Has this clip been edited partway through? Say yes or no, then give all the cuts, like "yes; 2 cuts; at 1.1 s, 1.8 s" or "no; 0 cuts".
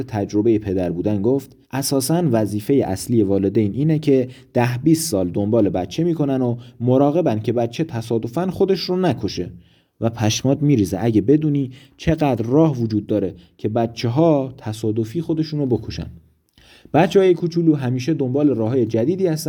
yes; 1 cut; at 1.6 s